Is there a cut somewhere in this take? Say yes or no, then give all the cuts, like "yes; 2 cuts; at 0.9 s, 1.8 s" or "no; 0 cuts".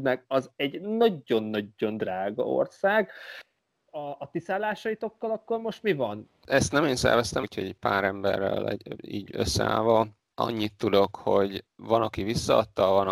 yes; 2 cuts; at 6.2 s, 7.4 s